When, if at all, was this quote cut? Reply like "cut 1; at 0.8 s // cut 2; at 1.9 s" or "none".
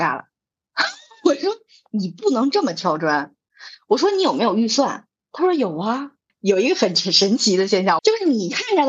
cut 1; at 6.3 s // cut 2; at 8.0 s